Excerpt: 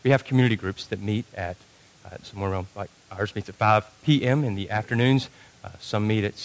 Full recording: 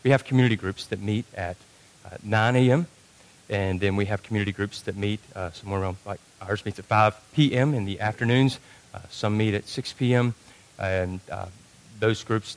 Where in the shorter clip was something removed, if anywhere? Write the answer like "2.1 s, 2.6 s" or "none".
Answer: 2.2 s